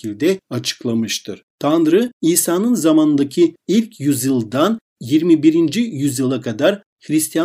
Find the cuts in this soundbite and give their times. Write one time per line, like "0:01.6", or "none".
none